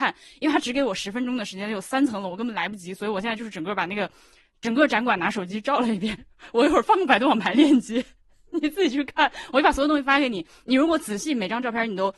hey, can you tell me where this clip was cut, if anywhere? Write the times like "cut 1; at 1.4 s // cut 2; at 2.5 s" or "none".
none

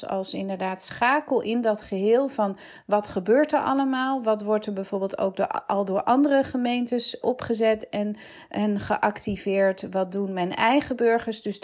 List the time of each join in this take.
cut 1; at 7.2 s

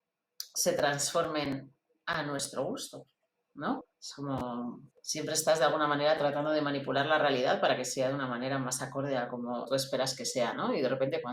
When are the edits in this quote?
cut 1; at 3.8 s // cut 2; at 4.9 s // cut 3; at 9.6 s

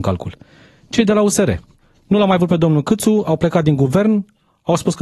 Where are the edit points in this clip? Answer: none

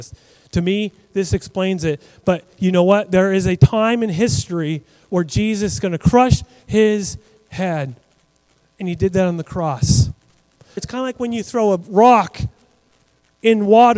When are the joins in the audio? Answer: cut 1; at 10.8 s

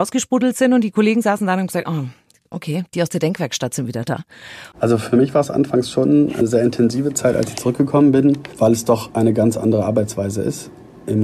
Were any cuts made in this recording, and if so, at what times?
cut 1; at 4.7 s

